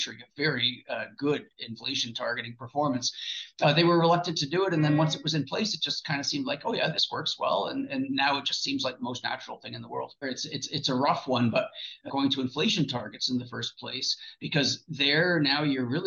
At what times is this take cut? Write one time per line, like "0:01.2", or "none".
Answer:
0:10.2
0:12.1